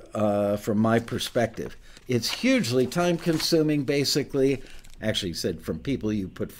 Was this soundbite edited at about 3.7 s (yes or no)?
no